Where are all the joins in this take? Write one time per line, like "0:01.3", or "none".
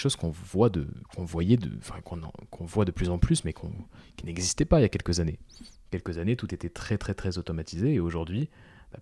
none

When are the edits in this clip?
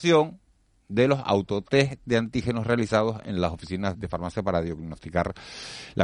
0:03.9

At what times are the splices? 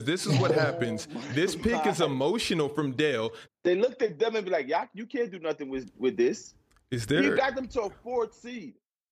0:03.5

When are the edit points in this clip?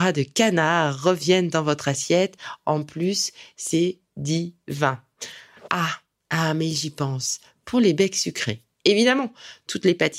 none

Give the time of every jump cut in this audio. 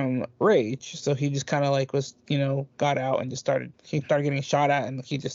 0:03.7

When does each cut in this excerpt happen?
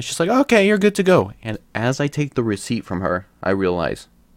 none

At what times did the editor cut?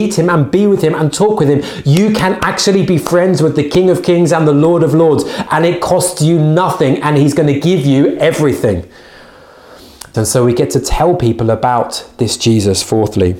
0:10.1

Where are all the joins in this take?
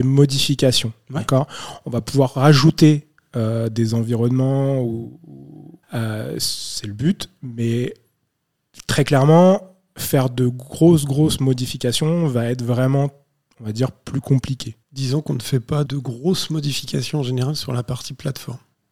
0:05.8
0:14.8
0:15.9

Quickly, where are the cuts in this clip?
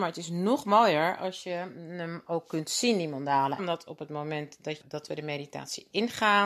0:03.6
0:04.8

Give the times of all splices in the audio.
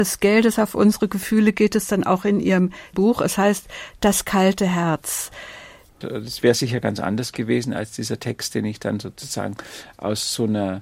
0:06.0

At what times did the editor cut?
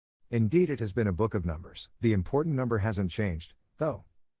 0:02.0

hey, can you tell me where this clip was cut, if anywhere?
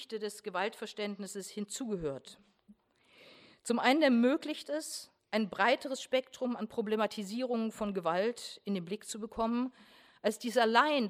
none

